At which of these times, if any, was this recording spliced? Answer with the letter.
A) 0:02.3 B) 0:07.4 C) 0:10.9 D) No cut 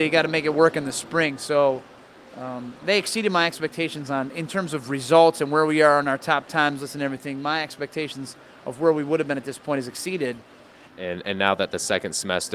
C